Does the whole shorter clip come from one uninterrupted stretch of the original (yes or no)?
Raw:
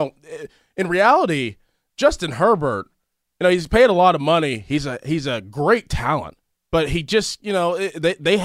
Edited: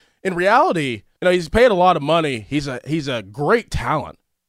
no